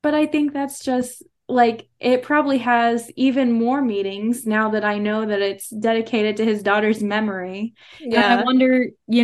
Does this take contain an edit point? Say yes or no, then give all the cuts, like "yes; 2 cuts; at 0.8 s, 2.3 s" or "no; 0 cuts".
no; 0 cuts